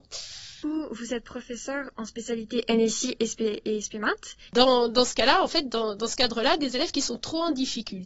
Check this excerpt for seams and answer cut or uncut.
cut